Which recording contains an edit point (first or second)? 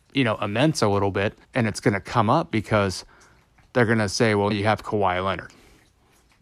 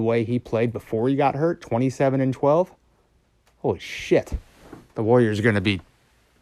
first